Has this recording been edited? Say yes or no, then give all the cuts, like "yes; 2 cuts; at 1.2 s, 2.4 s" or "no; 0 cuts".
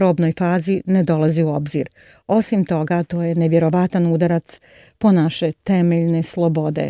no; 0 cuts